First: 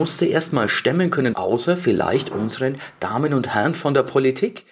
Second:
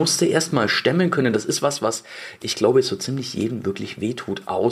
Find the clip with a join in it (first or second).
first